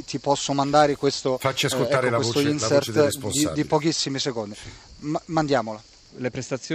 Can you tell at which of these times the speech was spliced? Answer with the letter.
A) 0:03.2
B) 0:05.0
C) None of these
C